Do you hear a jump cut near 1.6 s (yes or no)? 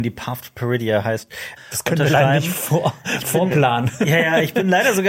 yes